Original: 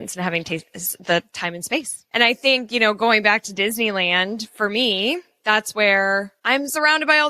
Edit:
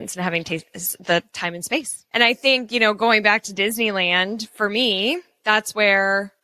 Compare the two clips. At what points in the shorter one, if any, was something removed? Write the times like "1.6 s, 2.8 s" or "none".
none